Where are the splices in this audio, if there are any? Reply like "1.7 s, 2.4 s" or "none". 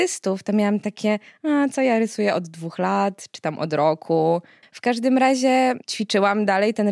4.6 s